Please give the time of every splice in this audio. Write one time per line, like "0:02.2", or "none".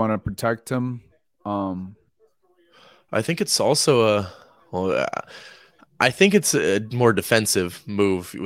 none